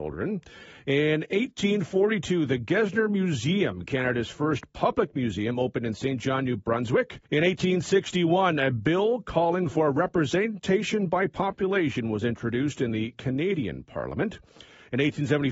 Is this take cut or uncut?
cut